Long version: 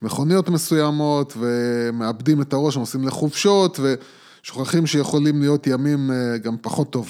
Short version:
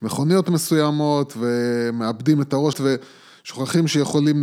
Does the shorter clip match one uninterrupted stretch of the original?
no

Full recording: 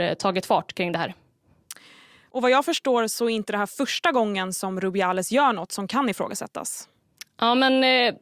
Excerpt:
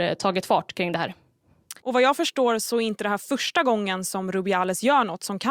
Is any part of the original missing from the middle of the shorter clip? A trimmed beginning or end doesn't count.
yes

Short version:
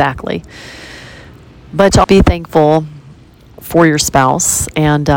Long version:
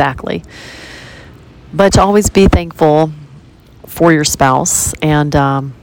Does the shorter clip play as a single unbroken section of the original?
no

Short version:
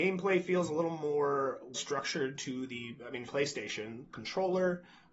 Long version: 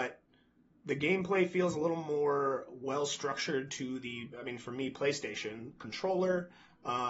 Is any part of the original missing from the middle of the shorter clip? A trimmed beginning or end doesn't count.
yes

